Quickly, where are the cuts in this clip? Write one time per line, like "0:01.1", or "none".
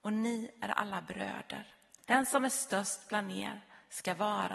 0:02.1